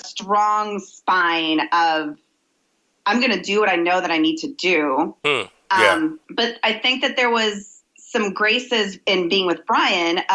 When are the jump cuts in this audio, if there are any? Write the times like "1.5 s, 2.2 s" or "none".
5.2 s, 6.2 s

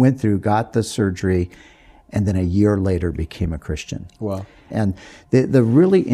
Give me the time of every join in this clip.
4.7 s

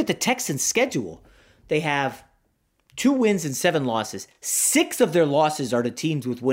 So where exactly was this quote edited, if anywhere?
none

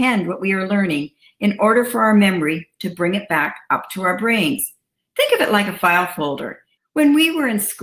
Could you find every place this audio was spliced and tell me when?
6.8 s

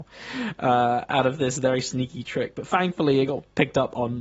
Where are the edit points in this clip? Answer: none

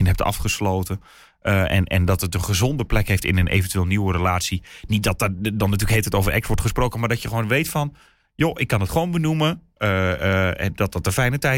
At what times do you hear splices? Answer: none

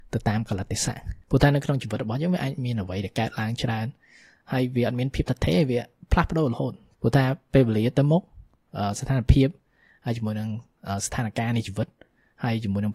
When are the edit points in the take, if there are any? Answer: 1.2 s

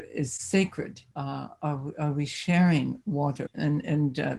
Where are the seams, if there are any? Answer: 1.1 s, 3.5 s

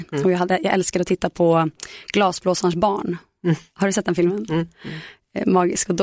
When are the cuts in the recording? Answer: none

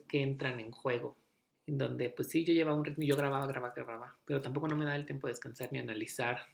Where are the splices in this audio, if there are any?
1.5 s

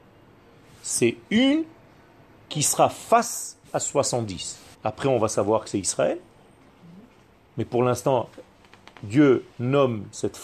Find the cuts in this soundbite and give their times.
4.7 s

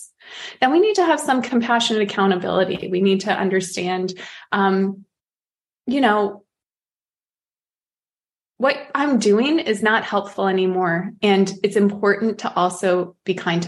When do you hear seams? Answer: none

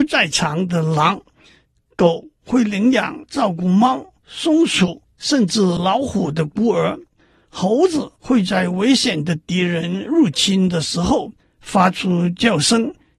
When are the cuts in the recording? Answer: none

